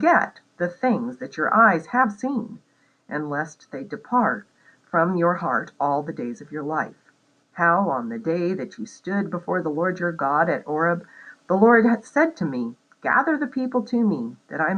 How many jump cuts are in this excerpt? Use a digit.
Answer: 1